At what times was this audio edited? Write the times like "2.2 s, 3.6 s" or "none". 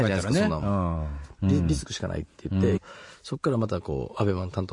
1.4 s, 2.8 s